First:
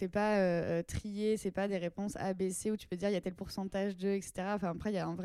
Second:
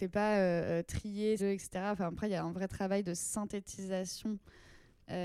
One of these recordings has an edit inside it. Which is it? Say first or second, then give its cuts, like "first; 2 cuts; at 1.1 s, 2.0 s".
second; 1 cut; at 1.4 s